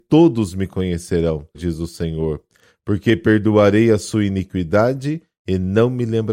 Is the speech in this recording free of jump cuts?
no; 1 cut; at 1.5 s

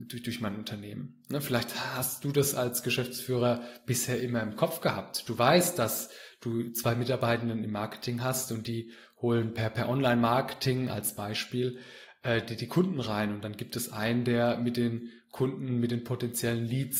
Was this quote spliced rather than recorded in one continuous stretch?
no; 0 cuts

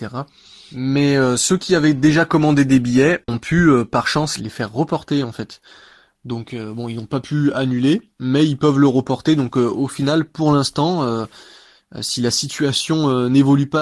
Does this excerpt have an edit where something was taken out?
yes; 1 cut; at 3.2 s

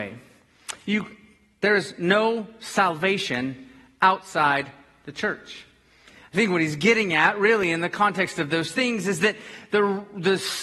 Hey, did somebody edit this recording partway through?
no; 0 cuts

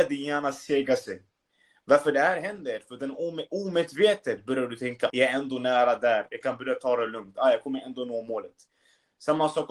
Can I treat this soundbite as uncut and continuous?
no; 2 cuts; at 5.1 s, 6.3 s

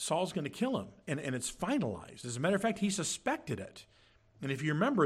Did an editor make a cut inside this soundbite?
no; 0 cuts

